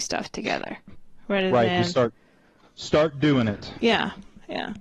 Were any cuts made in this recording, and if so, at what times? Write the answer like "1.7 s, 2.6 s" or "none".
none

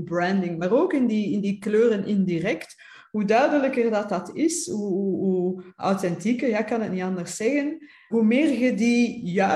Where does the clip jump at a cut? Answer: 8.1 s

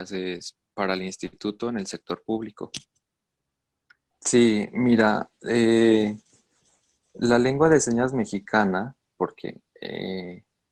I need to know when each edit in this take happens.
4.1 s

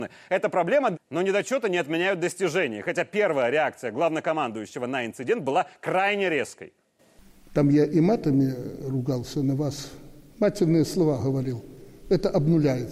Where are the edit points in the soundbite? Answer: 0.9 s

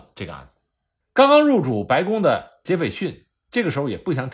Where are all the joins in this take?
1.0 s

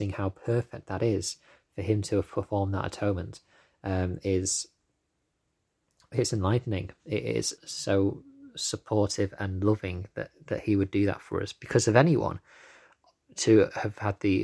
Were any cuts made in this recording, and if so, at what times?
7.6 s

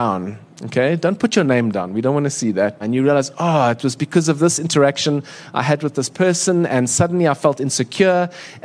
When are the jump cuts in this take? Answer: 2.8 s

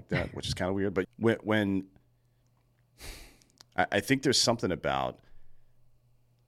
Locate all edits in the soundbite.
1.0 s

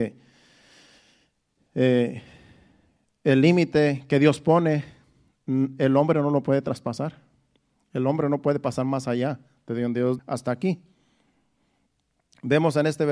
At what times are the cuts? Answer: 10.2 s

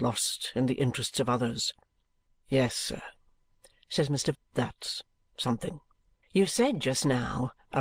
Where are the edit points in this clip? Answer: 2.3 s, 4.3 s, 6.2 s

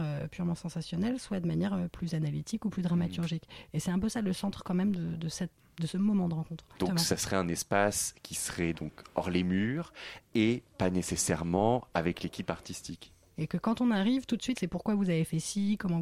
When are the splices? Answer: 6.8 s, 13.3 s, 14.6 s

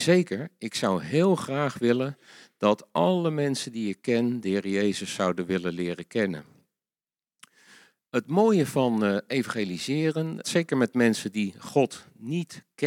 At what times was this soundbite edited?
10.4 s

